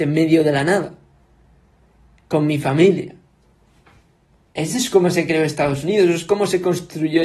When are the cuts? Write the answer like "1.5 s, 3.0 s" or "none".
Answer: none